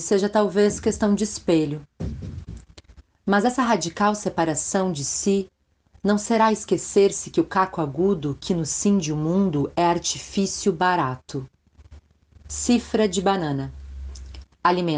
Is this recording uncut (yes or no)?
yes